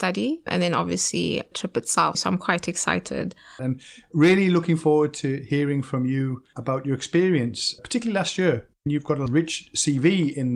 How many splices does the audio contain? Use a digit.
2